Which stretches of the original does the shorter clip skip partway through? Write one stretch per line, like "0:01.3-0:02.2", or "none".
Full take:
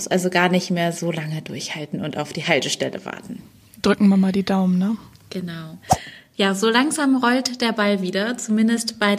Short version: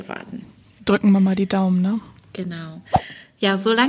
none

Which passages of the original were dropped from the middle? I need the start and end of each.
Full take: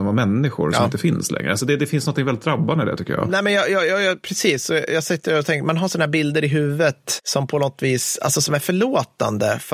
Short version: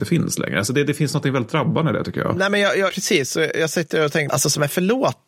0:03.8-0:04.2
0:05.6-0:08.2

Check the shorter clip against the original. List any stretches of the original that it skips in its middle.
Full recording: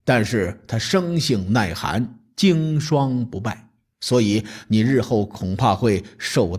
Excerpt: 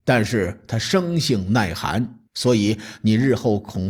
0:02.3-0:03.9

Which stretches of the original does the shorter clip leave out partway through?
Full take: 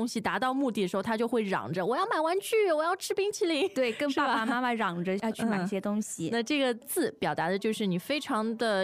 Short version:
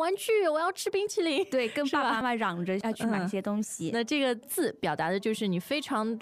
0:04.4-0:04.6

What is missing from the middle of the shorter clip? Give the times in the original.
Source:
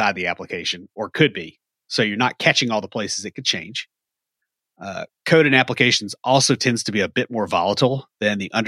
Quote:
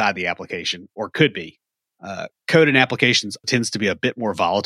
0:01.8-0:04.6
0:06.2-0:06.6

